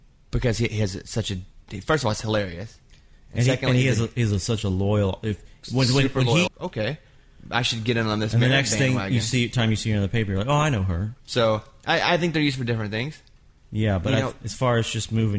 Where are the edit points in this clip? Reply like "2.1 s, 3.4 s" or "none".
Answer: 6.5 s, 11.2 s